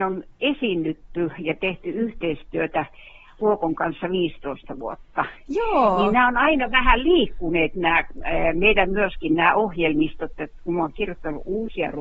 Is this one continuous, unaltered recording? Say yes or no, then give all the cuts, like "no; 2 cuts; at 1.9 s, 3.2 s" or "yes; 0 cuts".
yes; 0 cuts